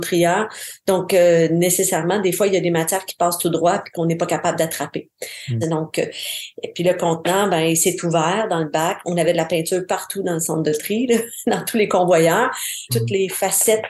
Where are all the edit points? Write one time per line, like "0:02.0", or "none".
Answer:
0:05.6
0:12.9